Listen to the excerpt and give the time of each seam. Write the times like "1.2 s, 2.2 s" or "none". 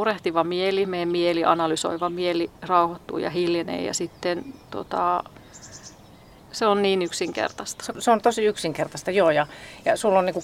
none